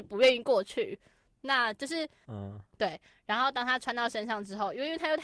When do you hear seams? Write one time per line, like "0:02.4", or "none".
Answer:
0:02.2

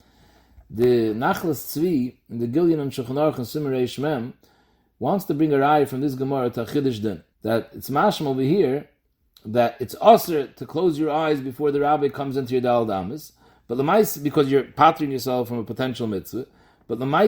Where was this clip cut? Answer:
0:07.3

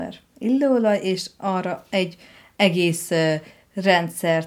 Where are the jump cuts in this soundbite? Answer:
none

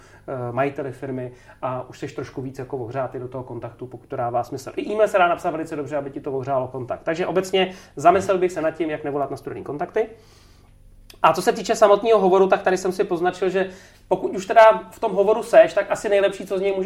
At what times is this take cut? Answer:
none

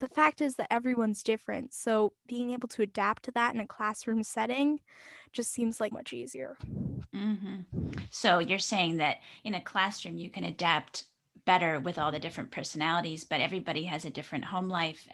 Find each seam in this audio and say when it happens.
0:05.9

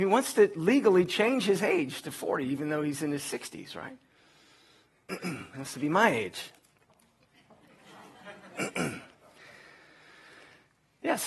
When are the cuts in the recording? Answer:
none

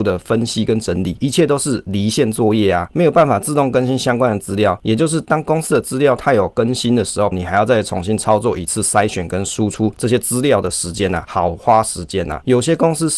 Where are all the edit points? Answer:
0:07.3

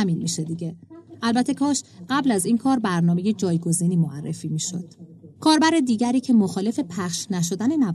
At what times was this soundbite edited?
0:05.4

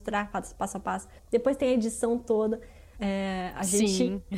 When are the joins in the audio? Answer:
0:01.2
0:03.0

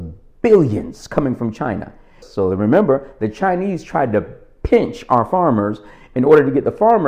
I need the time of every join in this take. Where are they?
0:02.2

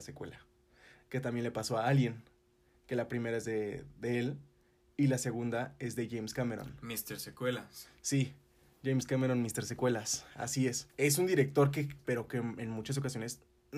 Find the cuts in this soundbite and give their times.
0:10.9
0:12.0

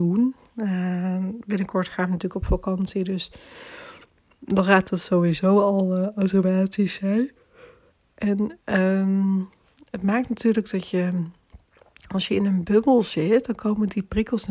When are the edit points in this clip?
none

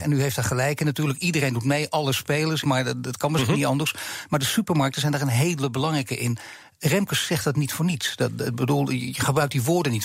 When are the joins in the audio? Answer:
0:02.6

